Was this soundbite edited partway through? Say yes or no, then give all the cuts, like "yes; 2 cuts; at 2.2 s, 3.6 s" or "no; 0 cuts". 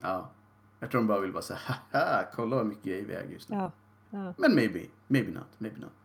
yes; 1 cut; at 4.1 s